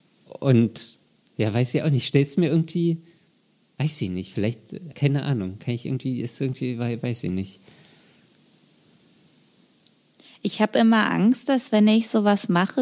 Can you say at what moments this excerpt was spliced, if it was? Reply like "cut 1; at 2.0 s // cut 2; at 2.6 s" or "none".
cut 1; at 4.9 s